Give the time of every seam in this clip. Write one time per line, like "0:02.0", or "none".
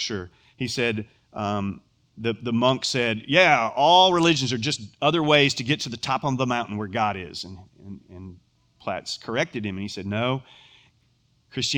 none